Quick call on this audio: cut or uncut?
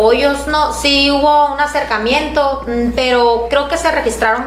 uncut